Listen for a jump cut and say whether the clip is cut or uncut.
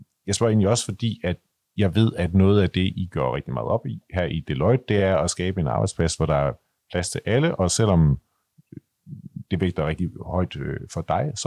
uncut